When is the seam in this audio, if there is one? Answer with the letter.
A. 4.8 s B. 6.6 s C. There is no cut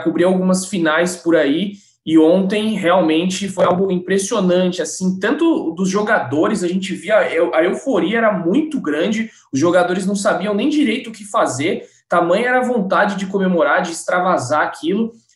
C